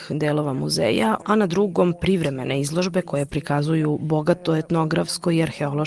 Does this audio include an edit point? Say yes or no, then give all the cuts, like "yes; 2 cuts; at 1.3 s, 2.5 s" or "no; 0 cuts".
yes; 1 cut; at 1.2 s